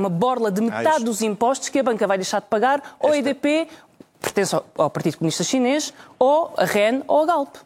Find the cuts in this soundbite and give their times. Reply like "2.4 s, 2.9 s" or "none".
none